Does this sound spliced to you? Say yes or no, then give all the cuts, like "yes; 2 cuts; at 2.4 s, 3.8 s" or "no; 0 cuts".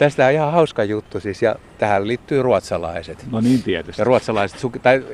no; 0 cuts